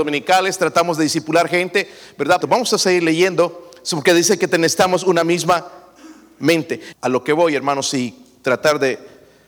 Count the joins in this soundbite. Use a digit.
2